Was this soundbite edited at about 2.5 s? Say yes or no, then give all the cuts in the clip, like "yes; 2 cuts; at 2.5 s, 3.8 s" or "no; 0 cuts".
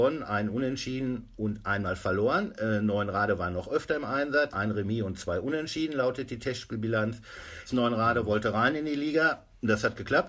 no; 2 cuts; at 4.5 s, 7.7 s